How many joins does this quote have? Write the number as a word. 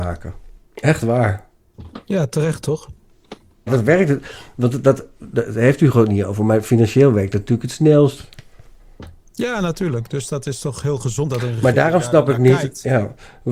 one